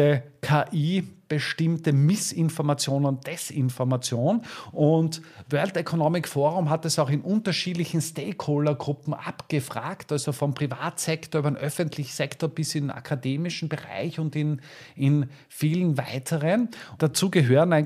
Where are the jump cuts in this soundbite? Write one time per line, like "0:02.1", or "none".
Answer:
0:17.0